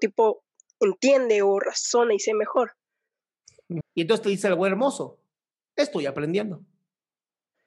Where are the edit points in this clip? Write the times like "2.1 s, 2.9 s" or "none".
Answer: 3.8 s